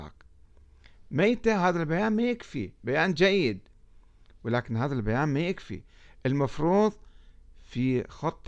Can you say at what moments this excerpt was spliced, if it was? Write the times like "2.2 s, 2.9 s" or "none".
none